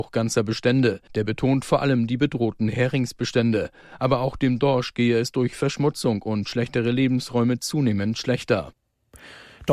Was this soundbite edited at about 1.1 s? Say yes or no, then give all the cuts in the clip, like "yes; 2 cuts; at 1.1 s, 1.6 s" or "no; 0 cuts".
yes; 1 cut; at 1.1 s